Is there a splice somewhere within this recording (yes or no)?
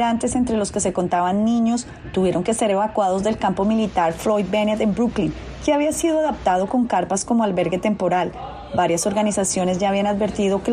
no